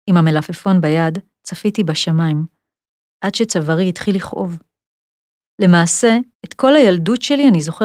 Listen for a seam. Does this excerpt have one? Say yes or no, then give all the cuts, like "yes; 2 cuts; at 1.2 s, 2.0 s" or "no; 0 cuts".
yes; 1 cut; at 6.3 s